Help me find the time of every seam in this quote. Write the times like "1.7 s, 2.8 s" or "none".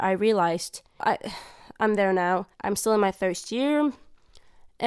1.0 s, 2.5 s

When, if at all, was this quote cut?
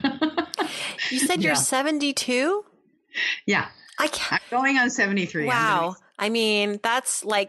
6.1 s

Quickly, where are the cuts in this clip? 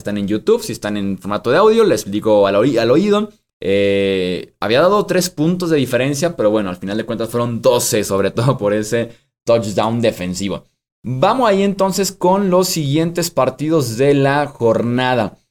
3.5 s

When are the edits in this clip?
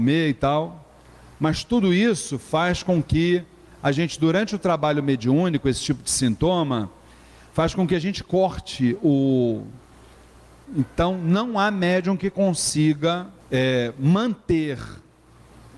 10.7 s, 13.4 s

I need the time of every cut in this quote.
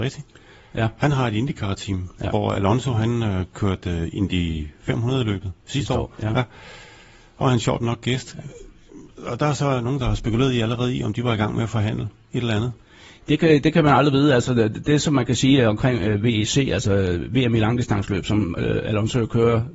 none

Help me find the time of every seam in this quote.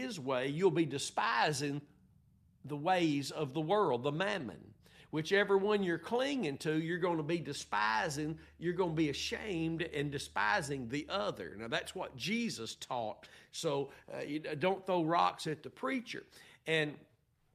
none

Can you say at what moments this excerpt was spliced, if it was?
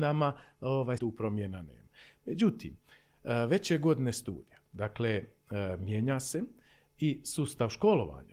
1.0 s

